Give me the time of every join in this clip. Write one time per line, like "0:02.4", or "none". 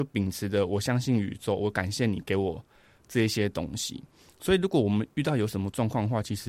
none